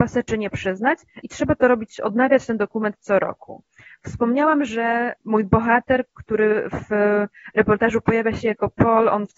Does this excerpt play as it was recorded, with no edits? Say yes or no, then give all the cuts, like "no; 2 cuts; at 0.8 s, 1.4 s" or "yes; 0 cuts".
yes; 0 cuts